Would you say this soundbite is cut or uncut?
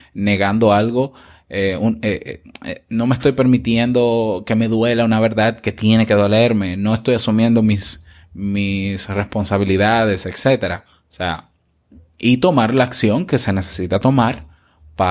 uncut